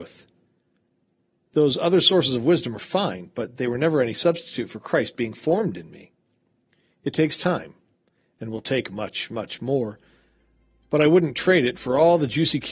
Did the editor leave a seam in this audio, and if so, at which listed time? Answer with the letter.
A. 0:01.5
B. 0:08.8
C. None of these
C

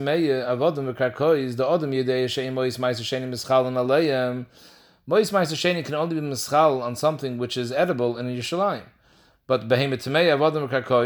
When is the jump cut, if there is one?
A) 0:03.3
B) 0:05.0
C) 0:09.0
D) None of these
D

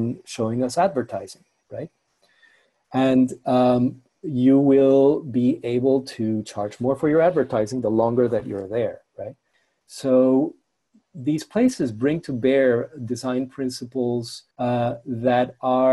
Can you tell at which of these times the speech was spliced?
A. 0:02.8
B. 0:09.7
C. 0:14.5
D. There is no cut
C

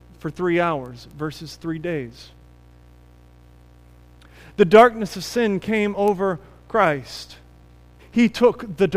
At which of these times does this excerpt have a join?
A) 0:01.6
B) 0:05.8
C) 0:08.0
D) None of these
C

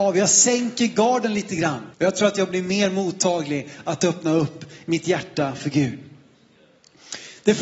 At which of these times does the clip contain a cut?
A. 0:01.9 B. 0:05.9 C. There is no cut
A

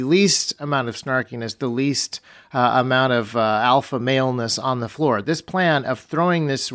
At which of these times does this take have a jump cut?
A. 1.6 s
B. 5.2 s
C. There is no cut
B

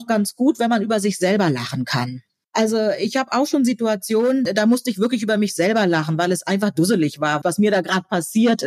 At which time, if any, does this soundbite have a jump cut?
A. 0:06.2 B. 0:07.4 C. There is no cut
C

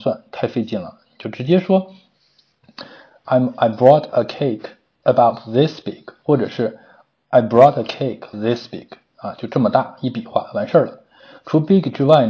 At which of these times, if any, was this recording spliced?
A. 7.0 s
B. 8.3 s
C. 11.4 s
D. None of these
B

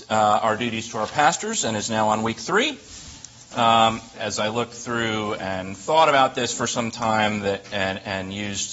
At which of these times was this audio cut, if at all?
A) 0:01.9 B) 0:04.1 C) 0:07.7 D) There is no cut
B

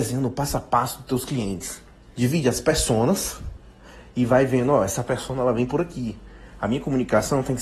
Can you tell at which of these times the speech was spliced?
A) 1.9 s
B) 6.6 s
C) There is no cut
C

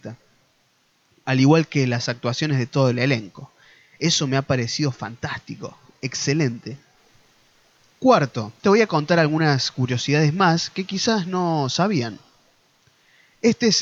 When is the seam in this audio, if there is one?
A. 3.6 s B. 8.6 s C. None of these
B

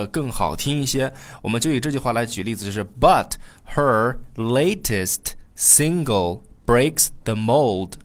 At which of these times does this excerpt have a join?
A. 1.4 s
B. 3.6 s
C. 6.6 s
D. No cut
D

